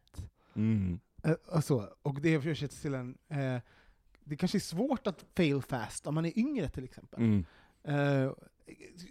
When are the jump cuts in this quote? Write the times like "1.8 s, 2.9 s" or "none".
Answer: none